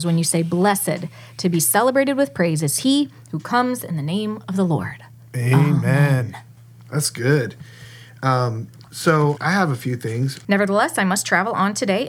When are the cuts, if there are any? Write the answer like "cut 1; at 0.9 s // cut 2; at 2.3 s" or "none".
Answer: cut 1; at 9.4 s // cut 2; at 10.4 s